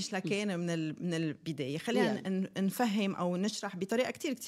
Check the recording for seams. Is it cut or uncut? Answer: uncut